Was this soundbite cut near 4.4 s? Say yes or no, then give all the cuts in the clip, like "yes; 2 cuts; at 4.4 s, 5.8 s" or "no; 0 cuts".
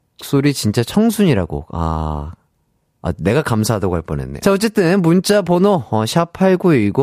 yes; 1 cut; at 4.4 s